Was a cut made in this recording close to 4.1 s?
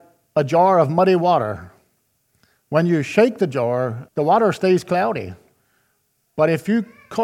yes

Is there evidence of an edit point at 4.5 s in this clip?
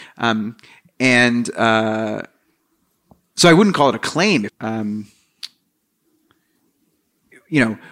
yes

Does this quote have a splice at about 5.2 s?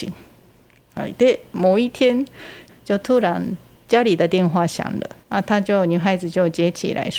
yes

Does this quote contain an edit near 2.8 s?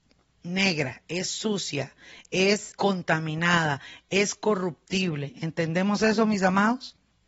yes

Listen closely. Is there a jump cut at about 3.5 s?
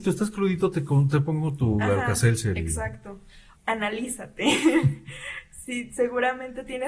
yes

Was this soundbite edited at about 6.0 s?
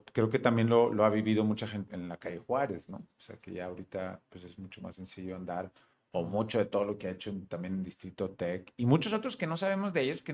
no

